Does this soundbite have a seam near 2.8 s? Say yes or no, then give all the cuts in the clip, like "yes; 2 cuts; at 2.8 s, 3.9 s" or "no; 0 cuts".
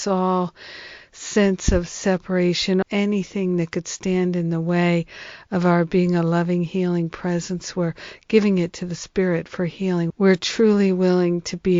yes; 2 cuts; at 2.8 s, 10.1 s